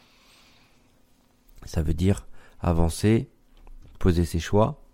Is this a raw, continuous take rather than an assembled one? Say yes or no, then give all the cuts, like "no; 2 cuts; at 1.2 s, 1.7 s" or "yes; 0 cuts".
yes; 0 cuts